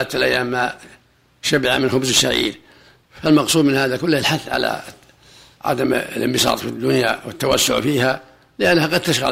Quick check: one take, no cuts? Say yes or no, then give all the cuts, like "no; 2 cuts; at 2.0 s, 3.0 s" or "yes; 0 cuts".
yes; 0 cuts